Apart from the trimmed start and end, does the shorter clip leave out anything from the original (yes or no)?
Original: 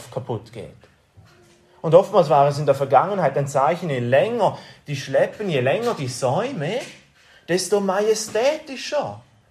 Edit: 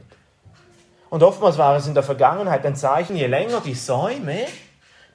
yes